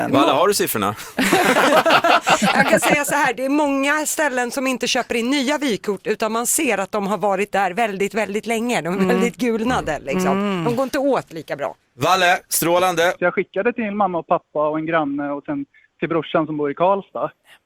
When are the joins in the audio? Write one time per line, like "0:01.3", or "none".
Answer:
0:13.2